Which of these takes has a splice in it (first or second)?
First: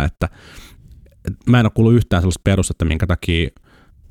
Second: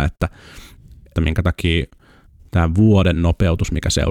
second